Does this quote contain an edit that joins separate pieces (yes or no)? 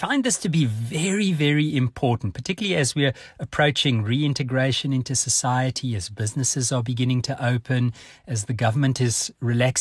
no